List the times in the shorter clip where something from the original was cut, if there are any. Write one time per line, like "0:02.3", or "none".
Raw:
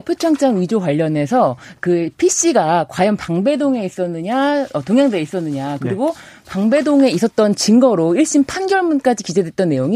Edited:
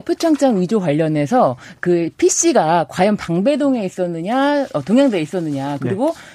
none